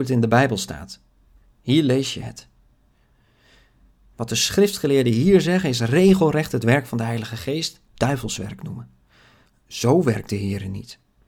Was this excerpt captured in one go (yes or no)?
no